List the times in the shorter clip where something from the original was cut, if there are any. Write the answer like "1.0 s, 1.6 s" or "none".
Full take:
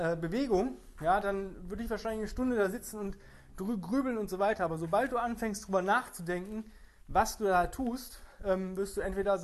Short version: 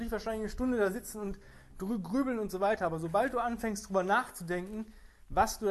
none